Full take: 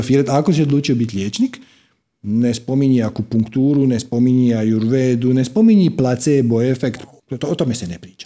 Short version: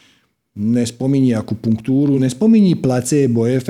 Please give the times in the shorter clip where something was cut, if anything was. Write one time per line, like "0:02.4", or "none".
0:02.2